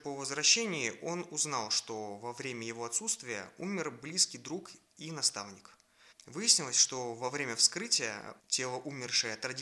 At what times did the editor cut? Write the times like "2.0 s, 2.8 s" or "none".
6.1 s, 8.4 s